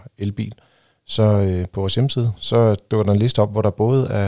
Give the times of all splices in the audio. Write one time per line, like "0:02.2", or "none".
none